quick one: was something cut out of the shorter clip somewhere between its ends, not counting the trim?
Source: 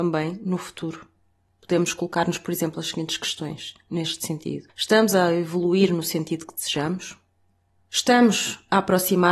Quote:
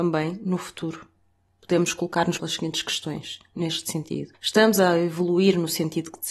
yes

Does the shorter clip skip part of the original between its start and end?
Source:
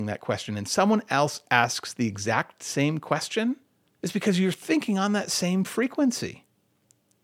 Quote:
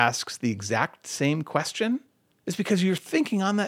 no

